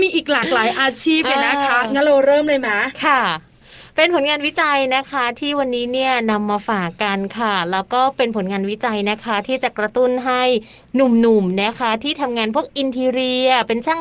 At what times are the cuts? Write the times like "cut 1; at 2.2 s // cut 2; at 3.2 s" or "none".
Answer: none